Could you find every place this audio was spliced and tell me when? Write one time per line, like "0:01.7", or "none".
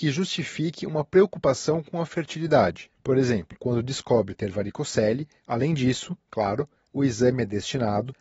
0:05.4